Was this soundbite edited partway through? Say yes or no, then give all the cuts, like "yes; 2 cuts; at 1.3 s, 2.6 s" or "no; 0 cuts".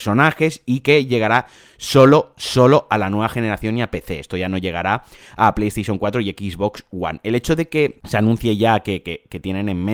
no; 0 cuts